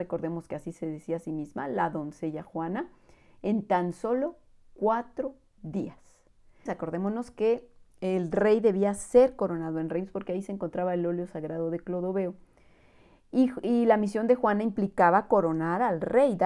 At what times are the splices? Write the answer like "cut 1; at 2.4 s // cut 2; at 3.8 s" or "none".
cut 1; at 6.7 s